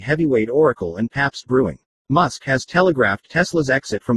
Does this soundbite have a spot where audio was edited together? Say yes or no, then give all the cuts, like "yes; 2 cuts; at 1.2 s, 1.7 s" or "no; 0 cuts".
no; 0 cuts